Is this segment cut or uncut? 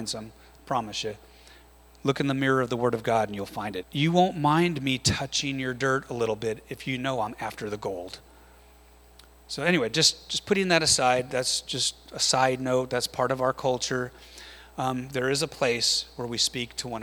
cut